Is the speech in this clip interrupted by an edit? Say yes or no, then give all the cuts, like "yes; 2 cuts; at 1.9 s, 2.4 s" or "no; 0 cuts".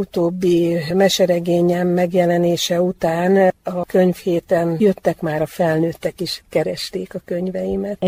no; 0 cuts